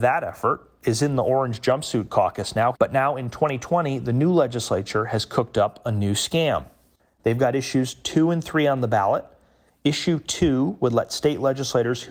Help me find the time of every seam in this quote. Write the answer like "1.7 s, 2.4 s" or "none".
2.7 s